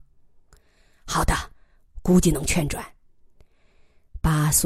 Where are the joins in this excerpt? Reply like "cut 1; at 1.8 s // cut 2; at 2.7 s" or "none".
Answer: none